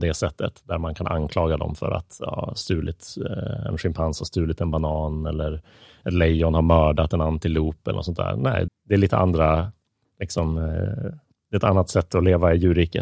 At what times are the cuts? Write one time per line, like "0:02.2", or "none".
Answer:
0:08.7